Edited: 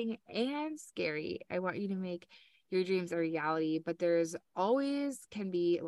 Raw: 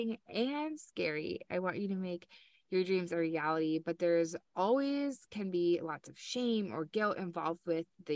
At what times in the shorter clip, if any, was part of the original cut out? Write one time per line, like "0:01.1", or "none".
none